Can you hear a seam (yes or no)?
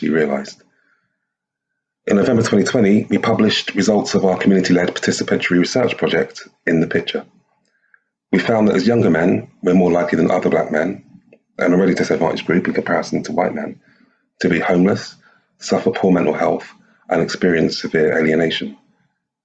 no